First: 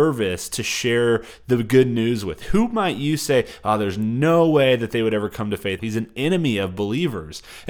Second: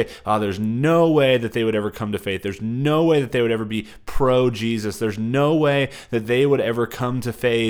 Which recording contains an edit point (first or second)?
first